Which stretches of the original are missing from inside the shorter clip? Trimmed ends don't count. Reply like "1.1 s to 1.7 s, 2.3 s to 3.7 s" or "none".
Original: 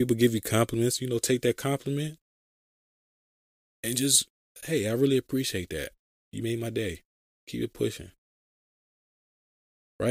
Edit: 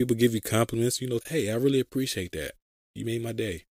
1.2 s to 4.6 s